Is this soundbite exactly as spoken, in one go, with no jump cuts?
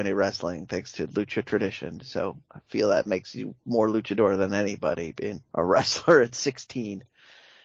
no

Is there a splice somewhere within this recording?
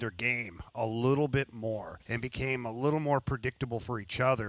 yes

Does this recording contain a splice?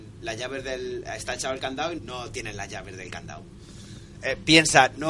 yes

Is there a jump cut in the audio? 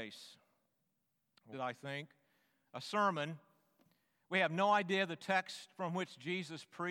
yes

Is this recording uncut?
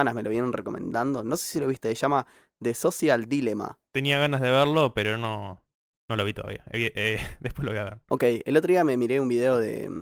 yes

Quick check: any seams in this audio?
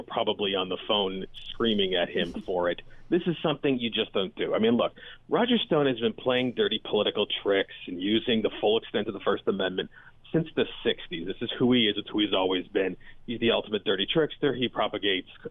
no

